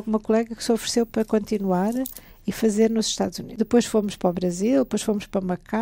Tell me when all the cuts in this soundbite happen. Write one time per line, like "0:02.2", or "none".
none